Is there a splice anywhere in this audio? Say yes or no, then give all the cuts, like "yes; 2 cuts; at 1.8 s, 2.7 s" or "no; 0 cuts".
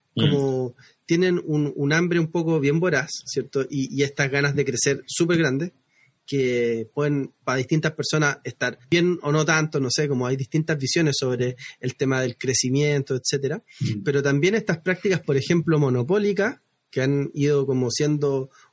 no; 0 cuts